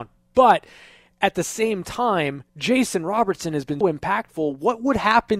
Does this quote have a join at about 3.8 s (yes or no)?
yes